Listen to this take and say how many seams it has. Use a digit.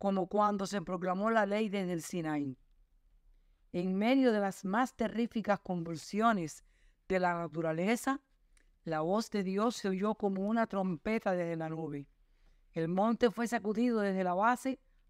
0